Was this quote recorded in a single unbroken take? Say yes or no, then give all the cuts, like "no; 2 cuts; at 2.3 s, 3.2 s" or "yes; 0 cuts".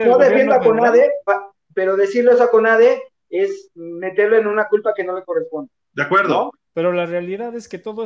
no; 2 cuts; at 1.3 s, 6.7 s